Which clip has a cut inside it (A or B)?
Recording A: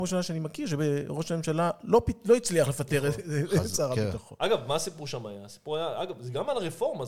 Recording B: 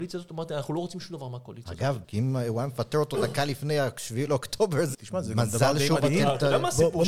B